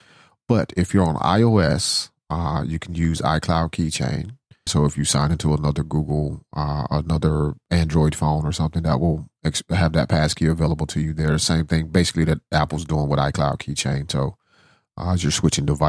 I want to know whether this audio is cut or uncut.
cut